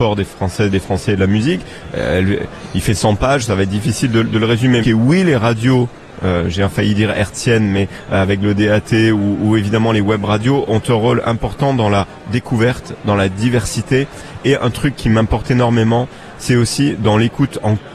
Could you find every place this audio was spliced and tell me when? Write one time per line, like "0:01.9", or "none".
0:04.8

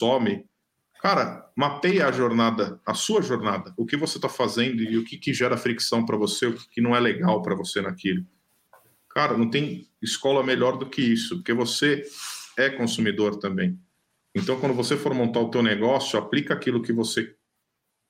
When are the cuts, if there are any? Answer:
none

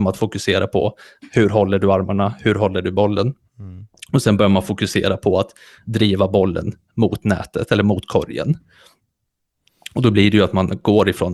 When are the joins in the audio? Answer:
none

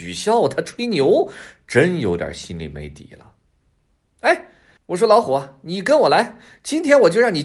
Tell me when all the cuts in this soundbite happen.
0:04.8

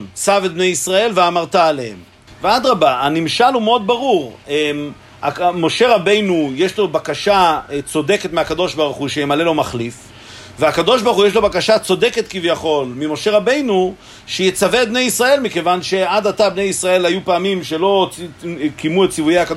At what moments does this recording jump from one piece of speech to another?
0:02.3

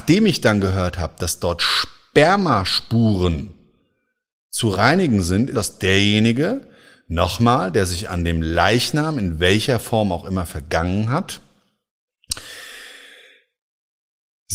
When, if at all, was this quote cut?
0:05.5

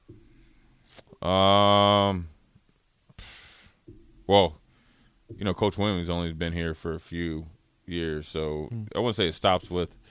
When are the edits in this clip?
0:08.9

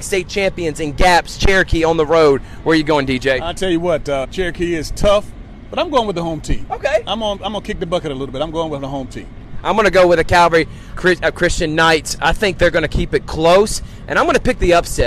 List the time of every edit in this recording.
0:04.2
0:10.9

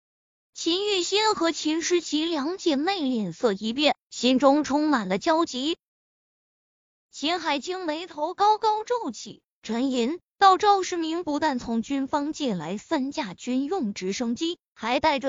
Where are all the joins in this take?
none

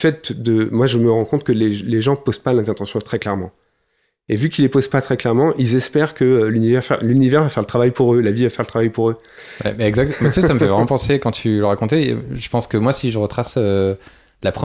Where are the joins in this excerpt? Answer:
none

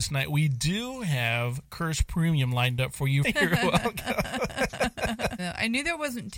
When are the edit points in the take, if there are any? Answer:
0:03.2
0:05.4

